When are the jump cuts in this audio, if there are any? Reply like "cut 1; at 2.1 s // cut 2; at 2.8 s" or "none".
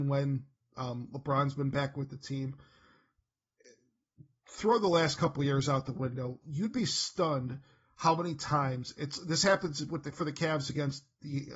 cut 1; at 6.4 s